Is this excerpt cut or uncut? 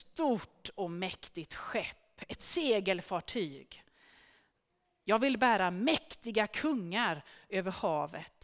uncut